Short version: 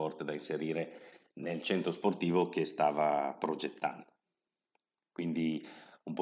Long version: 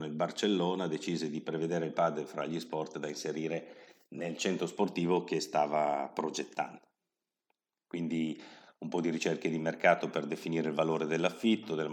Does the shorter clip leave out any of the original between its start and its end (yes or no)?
no